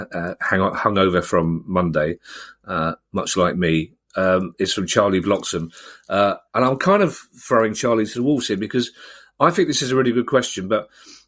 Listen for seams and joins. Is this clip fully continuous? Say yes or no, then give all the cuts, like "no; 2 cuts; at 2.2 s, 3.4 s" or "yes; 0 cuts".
yes; 0 cuts